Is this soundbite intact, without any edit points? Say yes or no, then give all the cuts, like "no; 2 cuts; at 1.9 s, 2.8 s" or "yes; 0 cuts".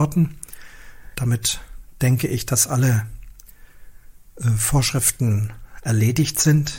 no; 1 cut; at 1.1 s